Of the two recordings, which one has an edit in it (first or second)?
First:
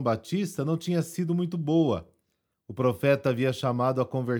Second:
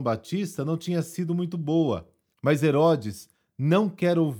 second